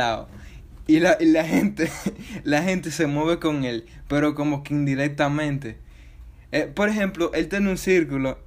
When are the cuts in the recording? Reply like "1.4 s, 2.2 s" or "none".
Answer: none